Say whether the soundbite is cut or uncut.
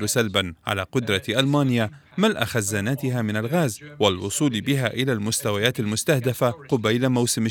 uncut